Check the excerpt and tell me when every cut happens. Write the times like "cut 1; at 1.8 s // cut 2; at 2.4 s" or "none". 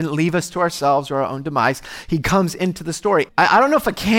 cut 1; at 3.3 s